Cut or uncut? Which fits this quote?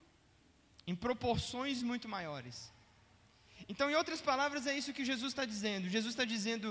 uncut